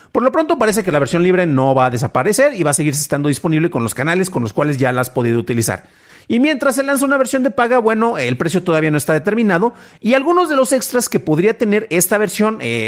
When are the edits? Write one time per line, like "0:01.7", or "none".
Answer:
none